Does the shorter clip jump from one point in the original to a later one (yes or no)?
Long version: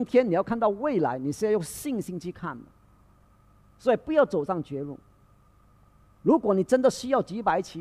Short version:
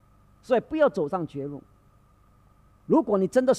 no